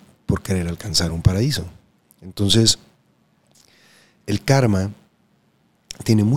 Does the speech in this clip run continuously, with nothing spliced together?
yes; 0 cuts

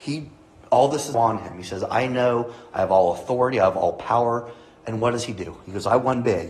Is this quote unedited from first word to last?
no; 1 cut; at 1.1 s

